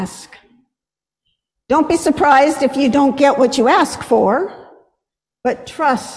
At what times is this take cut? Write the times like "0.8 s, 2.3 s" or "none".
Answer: none